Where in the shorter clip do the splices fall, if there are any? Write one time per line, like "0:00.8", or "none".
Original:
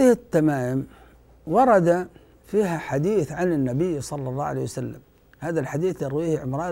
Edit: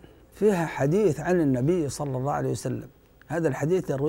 none